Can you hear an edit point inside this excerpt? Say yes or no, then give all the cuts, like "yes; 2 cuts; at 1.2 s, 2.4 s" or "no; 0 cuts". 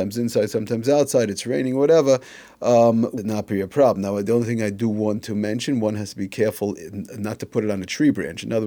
no; 0 cuts